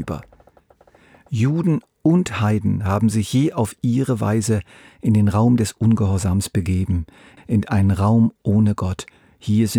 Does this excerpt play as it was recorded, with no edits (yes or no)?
no